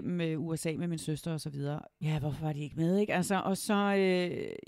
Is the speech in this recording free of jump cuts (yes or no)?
no